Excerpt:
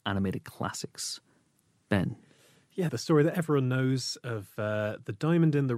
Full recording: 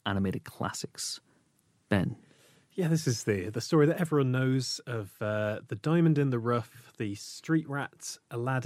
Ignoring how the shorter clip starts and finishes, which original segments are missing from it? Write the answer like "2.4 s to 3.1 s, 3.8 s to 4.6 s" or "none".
2.9 s to 3.5 s